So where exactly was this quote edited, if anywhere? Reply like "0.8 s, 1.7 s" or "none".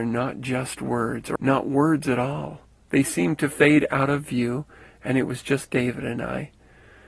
1.4 s, 2.9 s